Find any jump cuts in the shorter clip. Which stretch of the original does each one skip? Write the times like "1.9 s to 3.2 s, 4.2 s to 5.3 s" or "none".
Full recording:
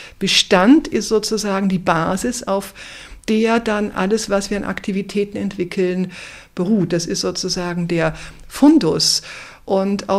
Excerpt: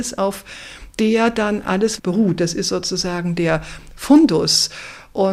4.3 s to 6.5 s